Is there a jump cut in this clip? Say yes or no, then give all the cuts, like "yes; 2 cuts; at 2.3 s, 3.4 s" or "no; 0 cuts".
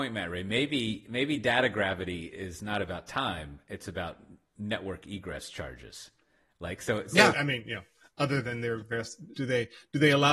yes; 2 cuts; at 7.3 s, 9.3 s